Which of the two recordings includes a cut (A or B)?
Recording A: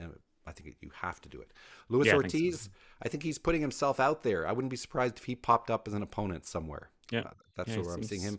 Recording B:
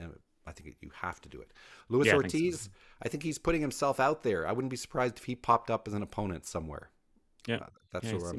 A